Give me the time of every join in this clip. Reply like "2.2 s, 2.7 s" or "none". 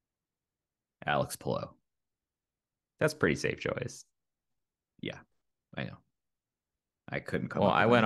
none